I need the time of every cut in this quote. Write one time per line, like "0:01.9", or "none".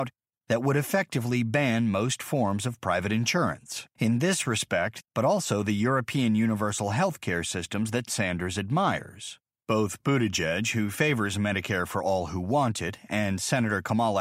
0:03.9
0:05.0